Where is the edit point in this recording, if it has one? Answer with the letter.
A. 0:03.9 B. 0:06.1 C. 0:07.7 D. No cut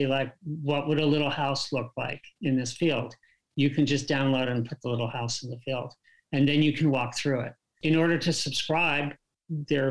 D